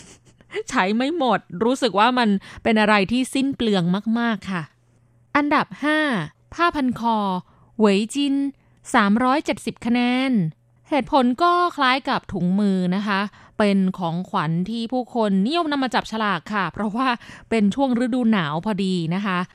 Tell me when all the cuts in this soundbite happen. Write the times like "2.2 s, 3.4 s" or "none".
none